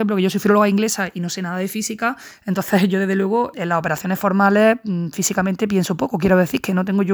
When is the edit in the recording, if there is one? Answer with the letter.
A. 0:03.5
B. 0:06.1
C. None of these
A